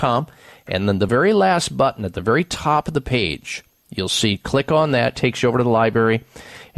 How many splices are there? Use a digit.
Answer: 0